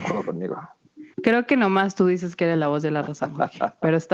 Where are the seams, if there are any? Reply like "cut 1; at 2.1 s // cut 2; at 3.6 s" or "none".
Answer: cut 1; at 1.1 s